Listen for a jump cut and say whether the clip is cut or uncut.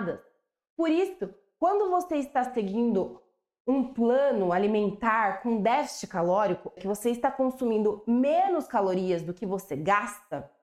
cut